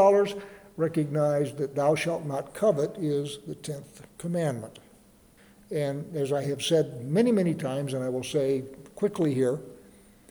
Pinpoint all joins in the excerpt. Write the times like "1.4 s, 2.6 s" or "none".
none